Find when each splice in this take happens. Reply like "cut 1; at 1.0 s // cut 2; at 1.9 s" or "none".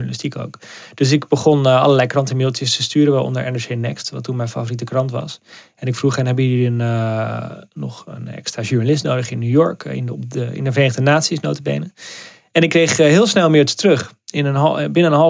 none